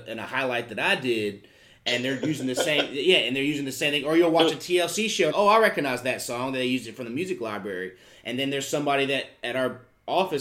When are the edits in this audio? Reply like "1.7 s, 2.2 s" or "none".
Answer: 5.3 s